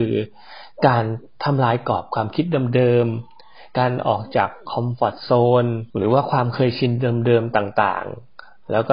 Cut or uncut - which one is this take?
cut